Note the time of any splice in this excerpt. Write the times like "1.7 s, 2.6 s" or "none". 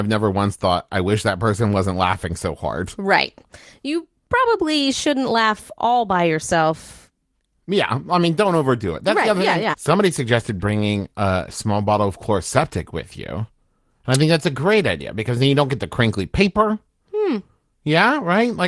9.7 s